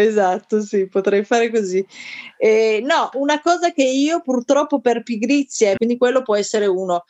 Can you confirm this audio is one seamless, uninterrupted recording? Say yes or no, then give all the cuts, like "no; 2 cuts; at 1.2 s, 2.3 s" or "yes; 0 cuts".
no; 2 cuts; at 3.1 s, 5.8 s